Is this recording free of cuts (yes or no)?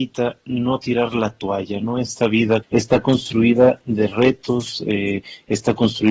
no